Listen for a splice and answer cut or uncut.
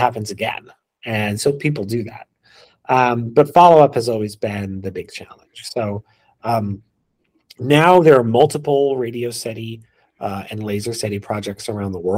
uncut